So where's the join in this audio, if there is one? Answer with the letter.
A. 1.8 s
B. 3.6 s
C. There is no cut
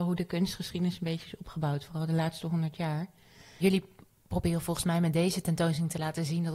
B